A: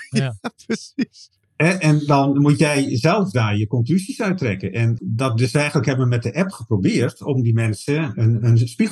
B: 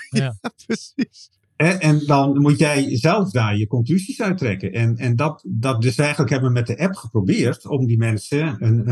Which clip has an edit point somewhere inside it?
A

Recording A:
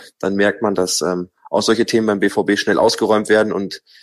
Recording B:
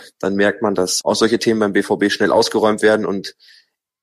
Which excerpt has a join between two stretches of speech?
B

